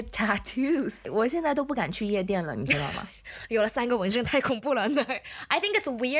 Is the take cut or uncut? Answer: uncut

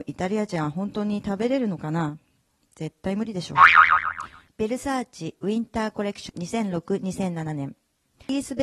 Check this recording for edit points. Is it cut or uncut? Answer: uncut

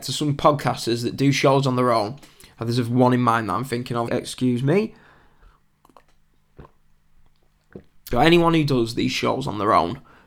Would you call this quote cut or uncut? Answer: cut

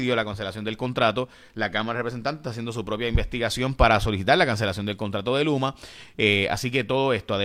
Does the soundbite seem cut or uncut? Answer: uncut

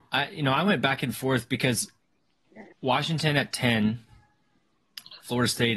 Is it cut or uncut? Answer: cut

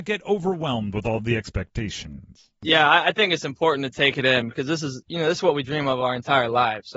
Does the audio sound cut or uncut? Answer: uncut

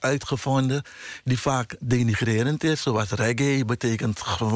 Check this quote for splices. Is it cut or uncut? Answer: uncut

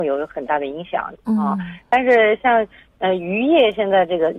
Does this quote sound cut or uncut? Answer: cut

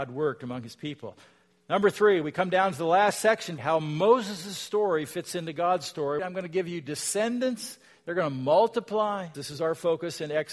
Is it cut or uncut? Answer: cut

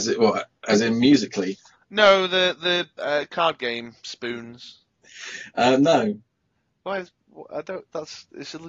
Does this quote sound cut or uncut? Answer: uncut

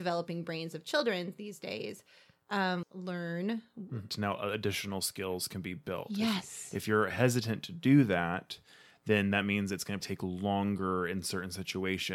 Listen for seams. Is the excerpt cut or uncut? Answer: cut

